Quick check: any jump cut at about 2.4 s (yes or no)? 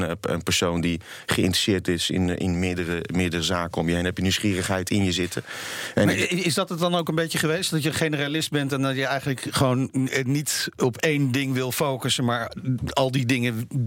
no